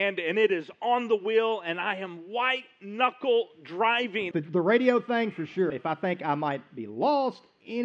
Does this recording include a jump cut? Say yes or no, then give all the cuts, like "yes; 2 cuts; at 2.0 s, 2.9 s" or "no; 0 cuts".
yes; 2 cuts; at 4.3 s, 5.7 s